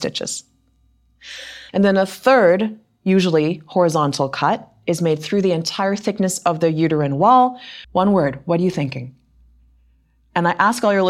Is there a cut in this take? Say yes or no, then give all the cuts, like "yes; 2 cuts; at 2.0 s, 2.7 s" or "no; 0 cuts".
yes; 2 cuts; at 1.7 s, 7.8 s